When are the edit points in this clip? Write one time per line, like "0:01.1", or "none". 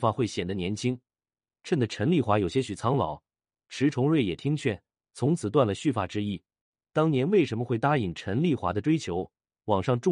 0:06.7

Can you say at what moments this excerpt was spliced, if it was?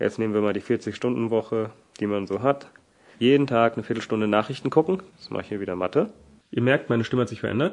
0:03.1
0:05.1
0:06.4

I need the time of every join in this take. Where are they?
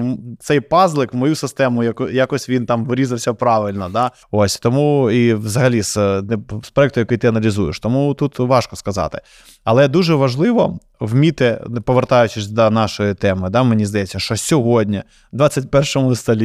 0:04.2
0:06.6

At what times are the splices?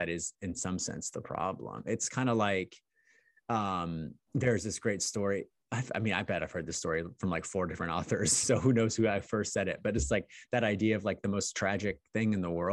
none

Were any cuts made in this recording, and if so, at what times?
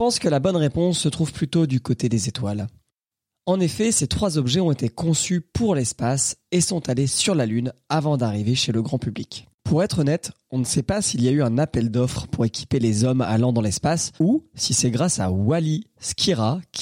0:09.5
0:14.2

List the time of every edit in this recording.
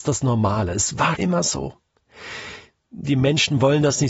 0:01.1

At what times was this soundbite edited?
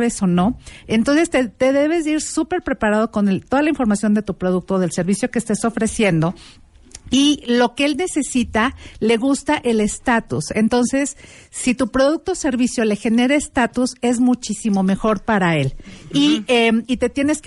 none

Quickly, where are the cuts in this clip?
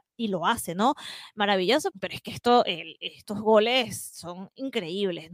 0:01.9

